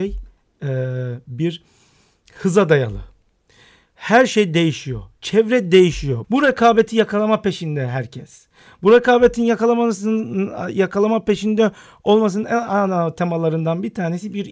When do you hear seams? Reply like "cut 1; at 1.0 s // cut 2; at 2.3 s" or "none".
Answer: cut 1; at 6.2 s